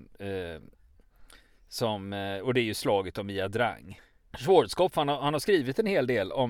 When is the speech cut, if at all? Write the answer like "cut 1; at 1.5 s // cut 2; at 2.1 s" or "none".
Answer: cut 1; at 4.3 s